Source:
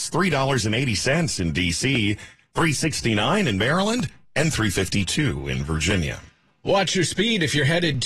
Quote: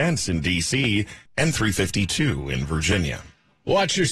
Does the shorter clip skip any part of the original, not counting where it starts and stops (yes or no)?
yes